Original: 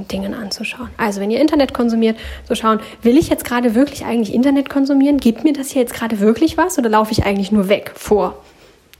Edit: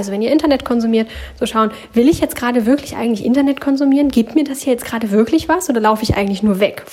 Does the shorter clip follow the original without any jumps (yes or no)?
yes